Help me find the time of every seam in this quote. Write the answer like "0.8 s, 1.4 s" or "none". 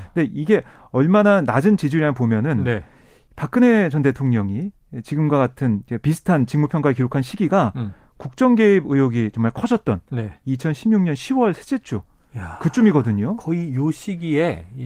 none